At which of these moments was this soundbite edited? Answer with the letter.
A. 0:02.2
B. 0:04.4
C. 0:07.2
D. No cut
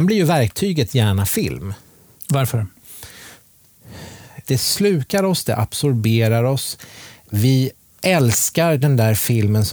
B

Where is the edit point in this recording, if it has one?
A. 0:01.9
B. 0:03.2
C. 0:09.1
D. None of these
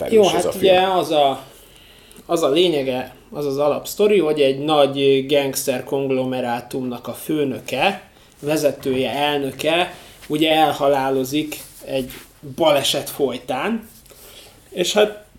D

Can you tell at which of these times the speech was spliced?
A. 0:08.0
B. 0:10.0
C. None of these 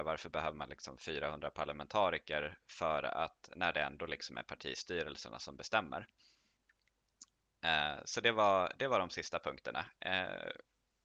C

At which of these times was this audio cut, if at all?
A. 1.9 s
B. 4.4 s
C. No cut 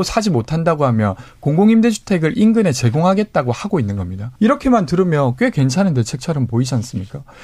B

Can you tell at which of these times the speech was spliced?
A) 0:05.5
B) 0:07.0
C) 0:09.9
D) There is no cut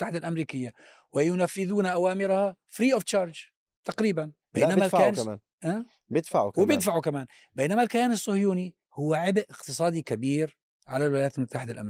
D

